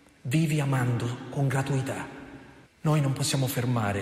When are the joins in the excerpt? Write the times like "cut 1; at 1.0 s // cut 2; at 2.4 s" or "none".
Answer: cut 1; at 2.7 s